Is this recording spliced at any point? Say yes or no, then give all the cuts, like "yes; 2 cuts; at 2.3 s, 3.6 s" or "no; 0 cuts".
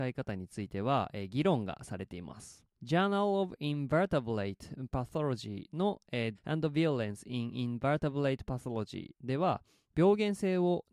yes; 2 cuts; at 2.7 s, 6.3 s